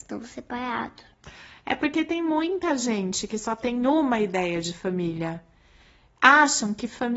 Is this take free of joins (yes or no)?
yes